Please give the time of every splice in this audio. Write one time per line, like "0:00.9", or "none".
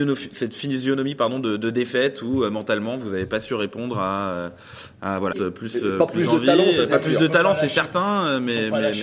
0:05.3